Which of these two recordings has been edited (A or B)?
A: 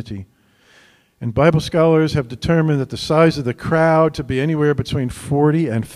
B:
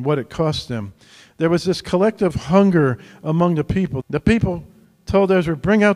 B